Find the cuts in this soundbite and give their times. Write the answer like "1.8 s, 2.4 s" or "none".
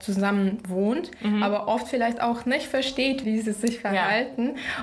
3.2 s